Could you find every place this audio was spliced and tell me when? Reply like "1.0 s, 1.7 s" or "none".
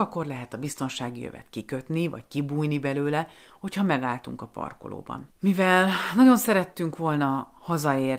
5.3 s

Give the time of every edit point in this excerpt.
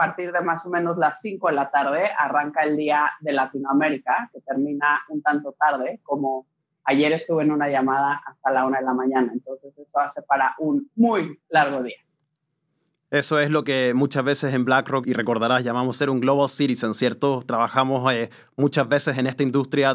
none

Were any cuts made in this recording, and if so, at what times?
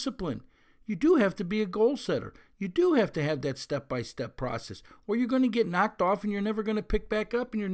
none

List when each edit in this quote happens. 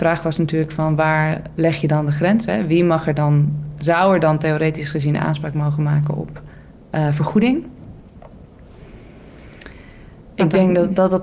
8.0 s

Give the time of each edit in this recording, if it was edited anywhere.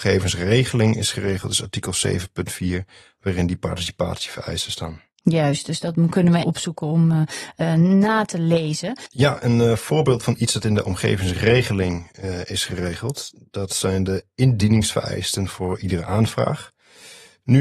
6.4 s, 9.1 s

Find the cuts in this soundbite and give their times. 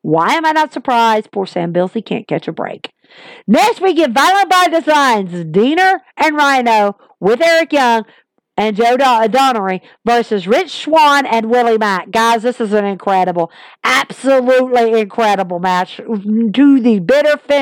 none

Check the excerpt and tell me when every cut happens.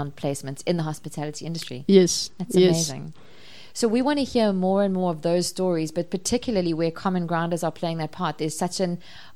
none

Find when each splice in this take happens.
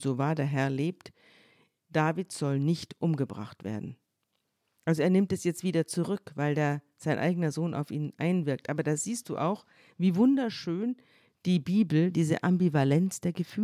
none

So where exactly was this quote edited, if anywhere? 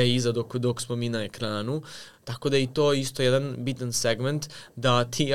none

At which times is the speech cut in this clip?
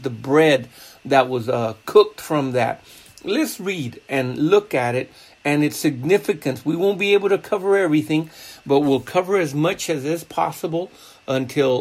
none

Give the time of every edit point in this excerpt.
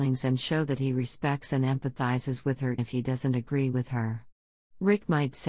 2.8 s

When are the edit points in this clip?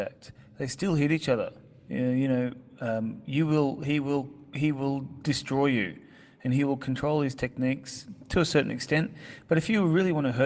1.9 s

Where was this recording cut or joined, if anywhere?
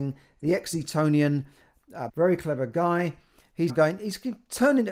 2.1 s, 3.7 s

